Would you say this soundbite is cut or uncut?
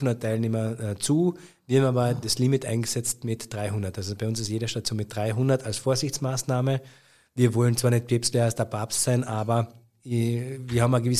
uncut